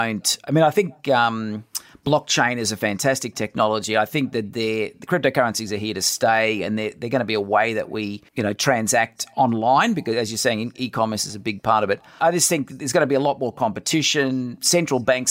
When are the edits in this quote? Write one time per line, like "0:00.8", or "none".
0:08.3